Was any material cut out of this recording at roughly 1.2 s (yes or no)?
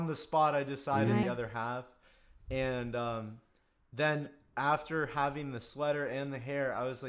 yes